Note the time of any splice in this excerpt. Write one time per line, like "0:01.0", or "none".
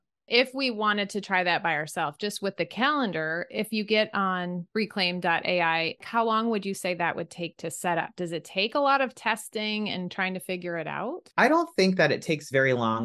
none